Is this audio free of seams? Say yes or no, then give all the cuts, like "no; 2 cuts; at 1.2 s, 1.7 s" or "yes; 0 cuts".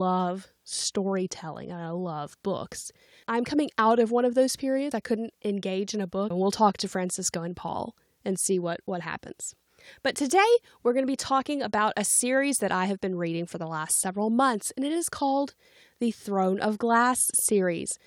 no; 2 cuts; at 4.9 s, 6.3 s